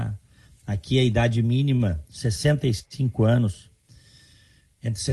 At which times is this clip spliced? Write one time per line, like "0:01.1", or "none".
none